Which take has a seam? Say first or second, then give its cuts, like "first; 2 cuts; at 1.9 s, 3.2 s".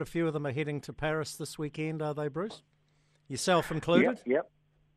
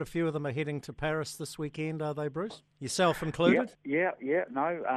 second; 2 cuts; at 2.7 s, 3.7 s